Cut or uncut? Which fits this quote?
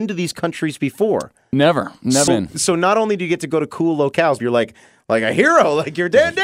cut